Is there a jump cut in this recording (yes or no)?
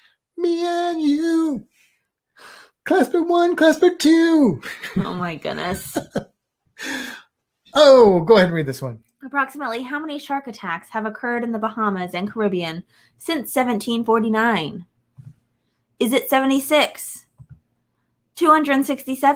no